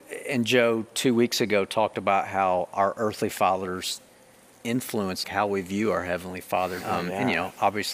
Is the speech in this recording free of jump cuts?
no; 2 cuts; at 5.2 s, 6.8 s

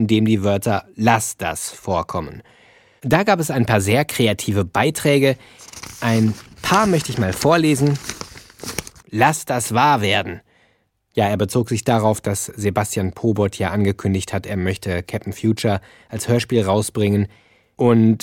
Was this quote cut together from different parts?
yes; 1 cut; at 9.0 s

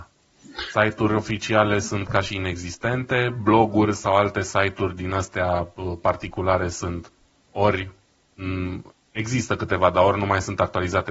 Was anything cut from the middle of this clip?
no; 0 cuts

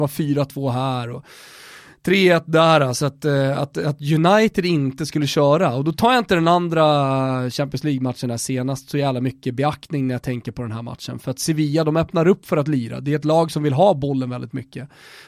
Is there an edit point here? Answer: no; 0 cuts

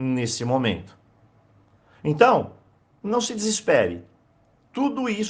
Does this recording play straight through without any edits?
yes; 0 cuts

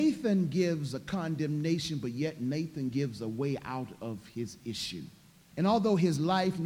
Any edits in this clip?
yes; 1 cut; at 5.5 s

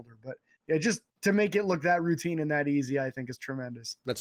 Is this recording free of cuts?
no; 1 cut; at 1.1 s

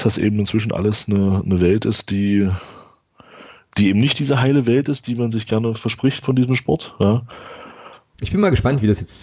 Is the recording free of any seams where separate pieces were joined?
no; 2 cuts; at 6.2 s, 8.1 s

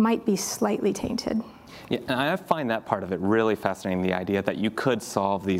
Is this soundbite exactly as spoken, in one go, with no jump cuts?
yes; 0 cuts

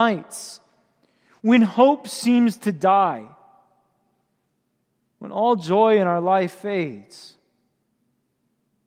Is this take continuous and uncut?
yes; 0 cuts

